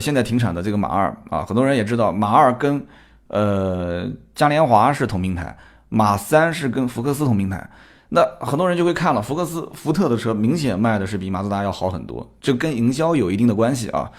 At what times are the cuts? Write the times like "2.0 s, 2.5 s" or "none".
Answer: none